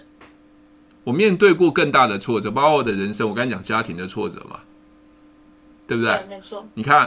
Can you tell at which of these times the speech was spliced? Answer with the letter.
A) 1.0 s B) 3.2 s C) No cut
C